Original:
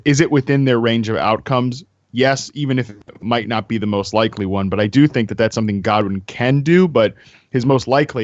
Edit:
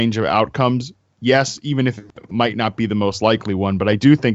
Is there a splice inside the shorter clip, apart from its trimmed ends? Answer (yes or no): no